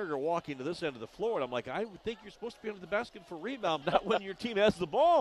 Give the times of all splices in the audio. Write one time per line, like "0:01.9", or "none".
0:03.8